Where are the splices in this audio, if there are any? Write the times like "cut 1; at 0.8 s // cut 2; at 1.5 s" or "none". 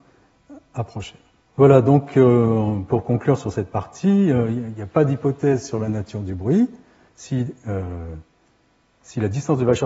cut 1; at 1.4 s // cut 2; at 7.1 s